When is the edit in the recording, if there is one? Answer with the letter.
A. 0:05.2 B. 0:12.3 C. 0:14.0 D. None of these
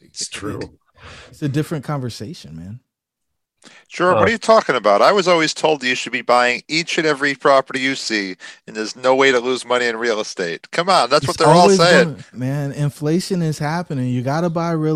B